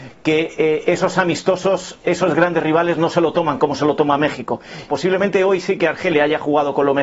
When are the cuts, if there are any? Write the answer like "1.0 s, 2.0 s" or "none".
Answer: 4.9 s